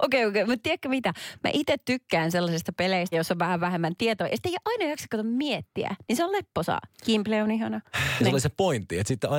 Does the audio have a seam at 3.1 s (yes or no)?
yes